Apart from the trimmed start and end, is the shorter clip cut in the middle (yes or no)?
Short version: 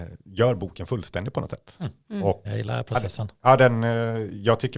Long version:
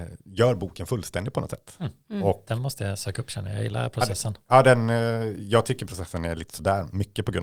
yes